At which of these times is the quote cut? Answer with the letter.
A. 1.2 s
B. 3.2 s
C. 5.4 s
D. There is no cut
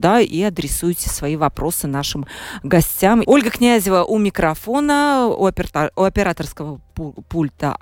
B